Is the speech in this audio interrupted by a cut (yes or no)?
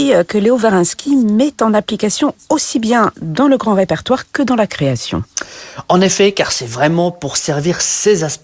no